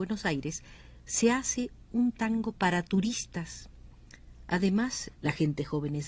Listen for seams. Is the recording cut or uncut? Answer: cut